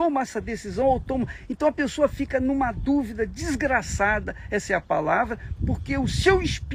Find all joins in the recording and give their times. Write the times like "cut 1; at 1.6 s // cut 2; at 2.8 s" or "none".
cut 1; at 5.6 s